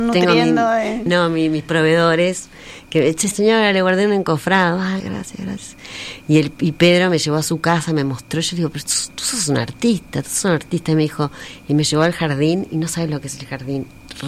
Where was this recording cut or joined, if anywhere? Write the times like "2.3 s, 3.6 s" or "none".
1.1 s, 3.3 s, 5.0 s